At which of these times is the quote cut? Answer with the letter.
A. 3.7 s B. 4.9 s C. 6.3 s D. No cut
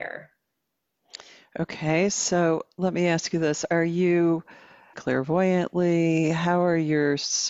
B